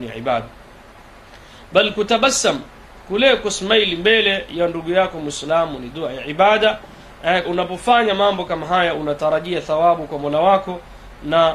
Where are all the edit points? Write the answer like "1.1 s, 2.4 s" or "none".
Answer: 7.4 s